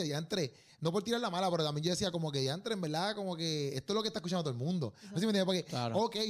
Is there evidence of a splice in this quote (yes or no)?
no